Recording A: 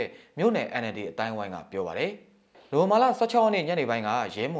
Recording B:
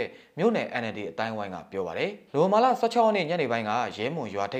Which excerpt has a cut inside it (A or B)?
B